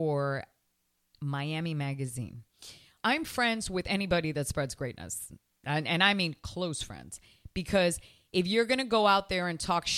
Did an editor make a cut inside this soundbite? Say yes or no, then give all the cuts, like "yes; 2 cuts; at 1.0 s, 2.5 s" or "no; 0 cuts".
yes; 1 cut; at 3.0 s